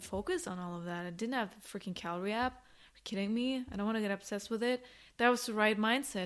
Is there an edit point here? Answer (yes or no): no